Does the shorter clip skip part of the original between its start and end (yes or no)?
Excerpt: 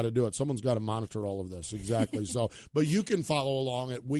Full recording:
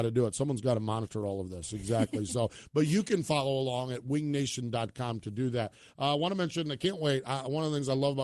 no